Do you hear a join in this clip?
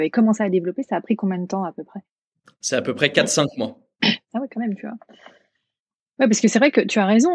no; 0 cuts

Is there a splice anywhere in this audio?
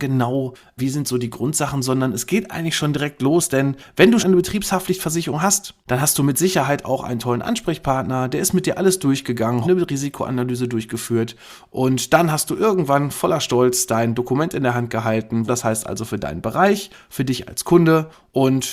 yes; 3 cuts; at 4.2 s, 9.6 s, 15.5 s

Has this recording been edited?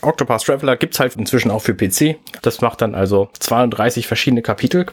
yes; 2 cuts; at 1.1 s, 2.4 s

